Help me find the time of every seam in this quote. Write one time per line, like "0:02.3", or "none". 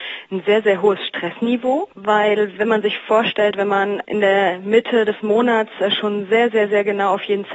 none